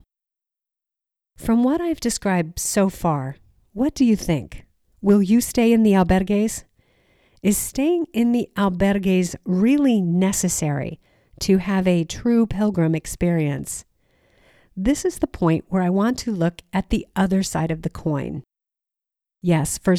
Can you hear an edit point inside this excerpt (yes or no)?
no